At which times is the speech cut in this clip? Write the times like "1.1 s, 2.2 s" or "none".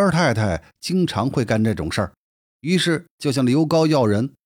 2.5 s